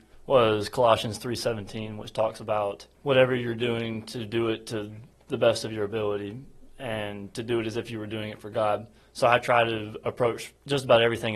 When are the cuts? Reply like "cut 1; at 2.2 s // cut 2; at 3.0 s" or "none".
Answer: none